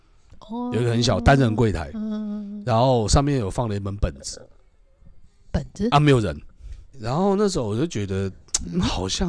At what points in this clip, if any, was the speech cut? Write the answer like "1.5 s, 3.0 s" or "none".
6.9 s